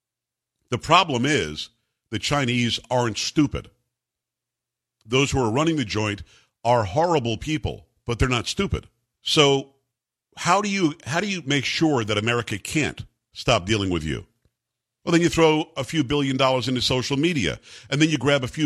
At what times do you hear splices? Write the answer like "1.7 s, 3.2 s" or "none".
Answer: 9.2 s, 15.0 s